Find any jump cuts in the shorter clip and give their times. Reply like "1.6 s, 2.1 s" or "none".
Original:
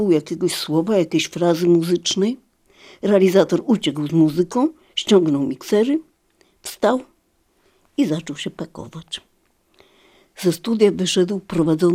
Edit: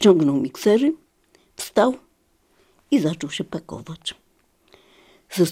none